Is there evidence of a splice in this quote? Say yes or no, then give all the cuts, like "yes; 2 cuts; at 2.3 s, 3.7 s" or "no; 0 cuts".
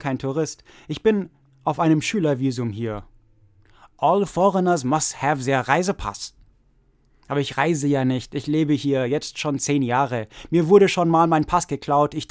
no; 0 cuts